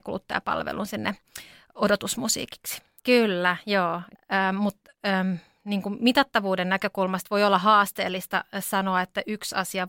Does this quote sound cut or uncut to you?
cut